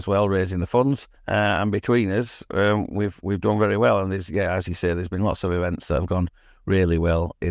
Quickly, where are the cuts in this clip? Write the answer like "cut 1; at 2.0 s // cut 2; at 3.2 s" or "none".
cut 1; at 1.2 s